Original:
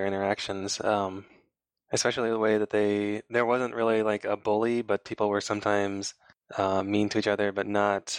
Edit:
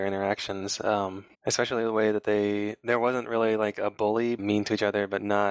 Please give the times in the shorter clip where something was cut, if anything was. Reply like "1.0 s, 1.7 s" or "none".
1.3 s, 4.4 s